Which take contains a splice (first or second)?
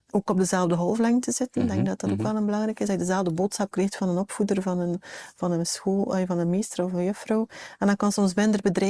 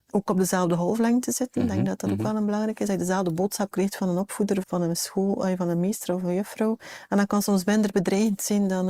second